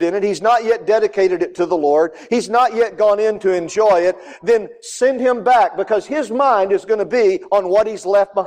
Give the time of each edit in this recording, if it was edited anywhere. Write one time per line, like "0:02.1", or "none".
none